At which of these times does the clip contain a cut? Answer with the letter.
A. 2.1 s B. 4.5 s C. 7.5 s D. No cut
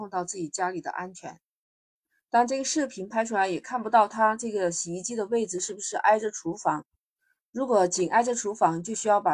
A